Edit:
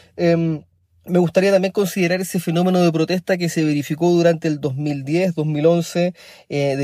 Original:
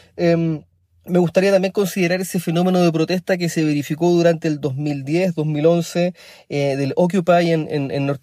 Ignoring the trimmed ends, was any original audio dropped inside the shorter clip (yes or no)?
no